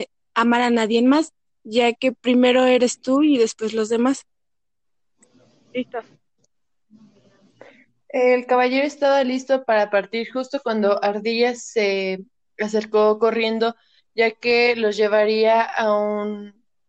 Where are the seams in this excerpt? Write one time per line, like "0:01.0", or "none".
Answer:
0:02.1